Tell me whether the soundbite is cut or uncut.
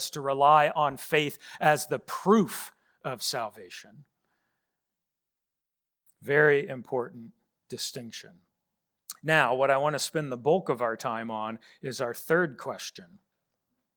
uncut